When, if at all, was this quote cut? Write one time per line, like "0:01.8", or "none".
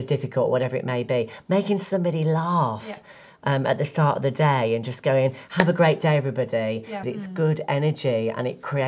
0:07.0